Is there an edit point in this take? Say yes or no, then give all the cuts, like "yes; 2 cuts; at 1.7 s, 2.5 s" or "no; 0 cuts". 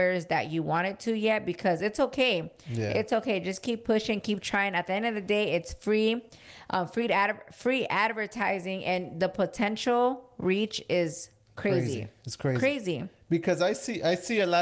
no; 0 cuts